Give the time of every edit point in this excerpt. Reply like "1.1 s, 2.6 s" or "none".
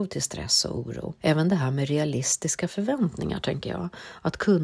1.2 s